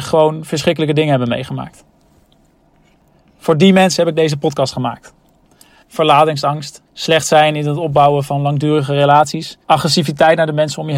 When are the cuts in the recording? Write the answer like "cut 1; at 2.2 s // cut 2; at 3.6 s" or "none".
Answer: cut 1; at 5.8 s // cut 2; at 6.9 s // cut 3; at 9.6 s